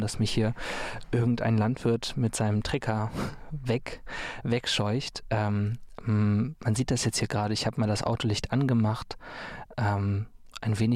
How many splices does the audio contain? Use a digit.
1